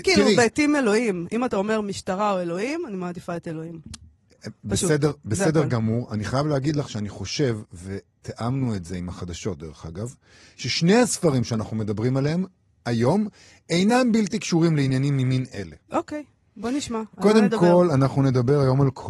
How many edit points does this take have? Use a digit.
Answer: 0